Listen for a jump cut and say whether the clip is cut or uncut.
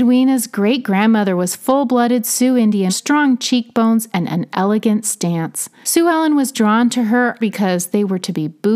cut